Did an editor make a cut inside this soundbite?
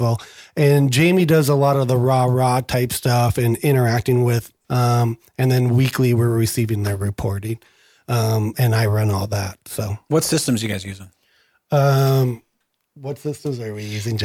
yes; 1 cut; at 4.6 s

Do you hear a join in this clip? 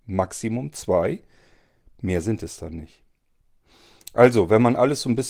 no; 0 cuts

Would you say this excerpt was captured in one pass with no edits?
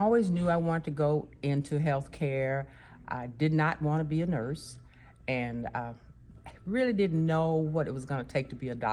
yes; 0 cuts

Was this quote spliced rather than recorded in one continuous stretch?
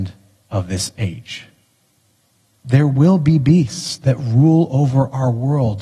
no; 0 cuts

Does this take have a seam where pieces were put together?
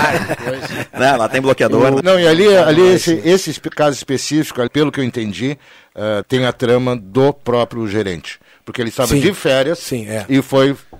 yes; 3 cuts; at 2.0 s, 4.7 s, 6.2 s

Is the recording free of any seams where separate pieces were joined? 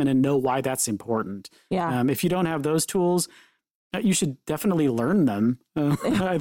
yes; 0 cuts

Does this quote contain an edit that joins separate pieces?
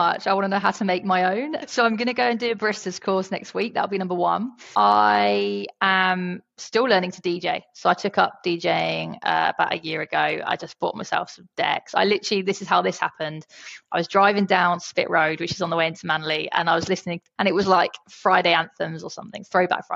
yes; 1 cut; at 17.4 s

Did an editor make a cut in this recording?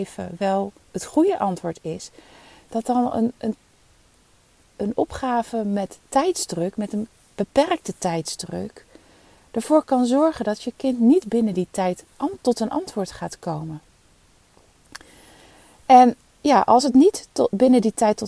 no; 0 cuts

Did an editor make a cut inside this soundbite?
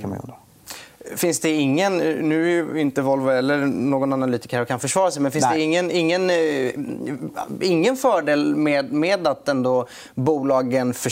no; 0 cuts

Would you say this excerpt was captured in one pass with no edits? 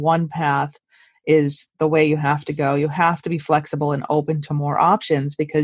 yes; 0 cuts

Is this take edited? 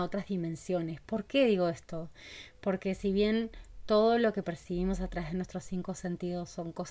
no; 0 cuts

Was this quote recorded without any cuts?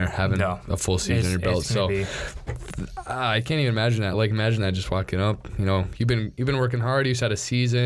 yes; 0 cuts

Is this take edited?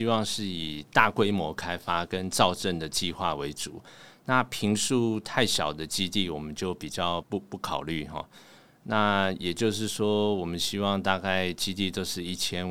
yes; 1 cut; at 7.2 s

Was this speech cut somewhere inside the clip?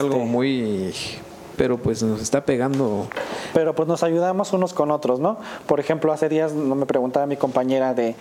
yes; 1 cut; at 1.5 s

